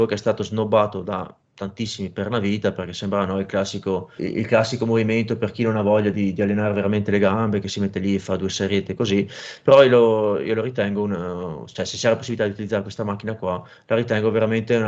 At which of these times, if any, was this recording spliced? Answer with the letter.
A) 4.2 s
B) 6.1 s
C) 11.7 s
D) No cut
A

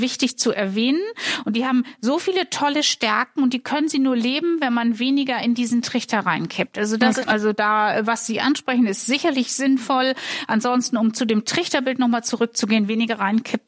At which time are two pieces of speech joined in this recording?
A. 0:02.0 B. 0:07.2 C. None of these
B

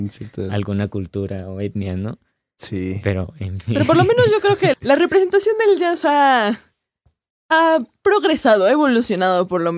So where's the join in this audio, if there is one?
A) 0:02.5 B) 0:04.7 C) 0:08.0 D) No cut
B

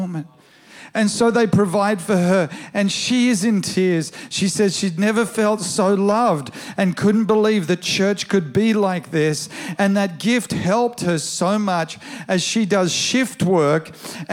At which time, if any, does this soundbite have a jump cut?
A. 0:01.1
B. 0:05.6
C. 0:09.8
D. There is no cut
D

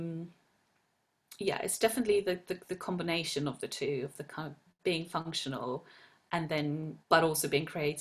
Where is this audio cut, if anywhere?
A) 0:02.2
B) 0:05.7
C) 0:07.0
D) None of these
C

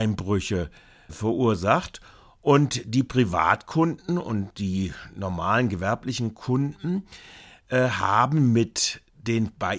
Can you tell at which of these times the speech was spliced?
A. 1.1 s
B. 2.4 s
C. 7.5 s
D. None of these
A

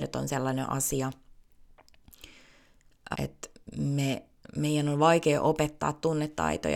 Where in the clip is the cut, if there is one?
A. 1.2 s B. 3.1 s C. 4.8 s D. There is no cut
B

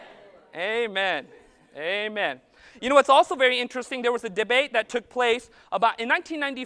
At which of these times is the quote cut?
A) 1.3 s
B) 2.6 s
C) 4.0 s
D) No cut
D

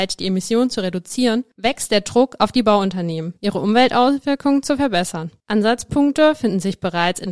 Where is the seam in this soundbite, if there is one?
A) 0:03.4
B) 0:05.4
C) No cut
A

